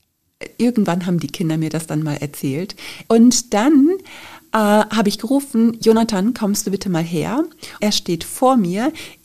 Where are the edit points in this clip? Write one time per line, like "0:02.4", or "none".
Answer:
0:03.1
0:07.8

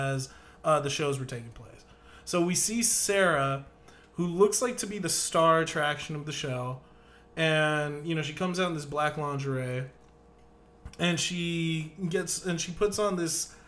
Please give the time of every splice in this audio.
none

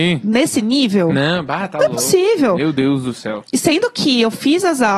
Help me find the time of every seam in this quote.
none

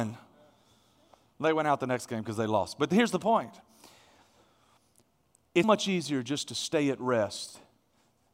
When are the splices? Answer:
0:05.6

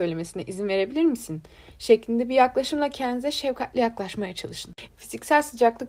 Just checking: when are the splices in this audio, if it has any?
0:04.9

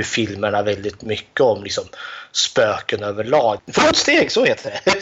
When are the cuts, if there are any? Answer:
0:03.6

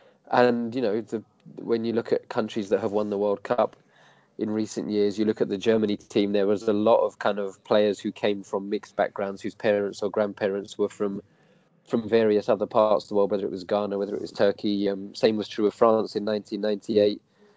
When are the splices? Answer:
none

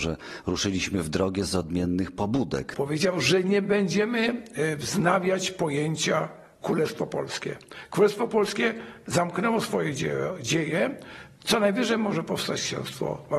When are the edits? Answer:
0:02.7

